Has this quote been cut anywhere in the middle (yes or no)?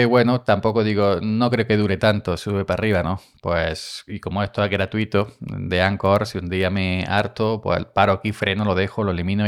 no